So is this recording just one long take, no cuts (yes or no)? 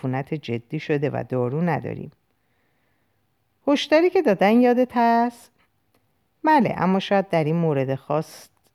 yes